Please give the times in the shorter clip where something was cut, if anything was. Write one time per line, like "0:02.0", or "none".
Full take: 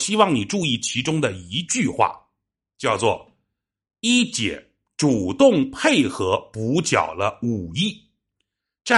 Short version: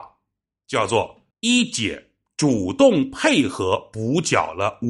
0:01.3